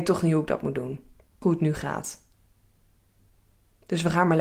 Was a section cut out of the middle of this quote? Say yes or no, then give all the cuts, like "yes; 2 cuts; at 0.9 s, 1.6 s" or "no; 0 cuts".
yes; 1 cut; at 1.4 s